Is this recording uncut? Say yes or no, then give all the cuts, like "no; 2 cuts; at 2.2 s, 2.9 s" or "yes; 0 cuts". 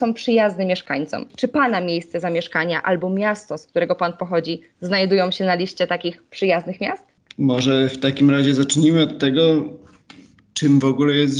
yes; 0 cuts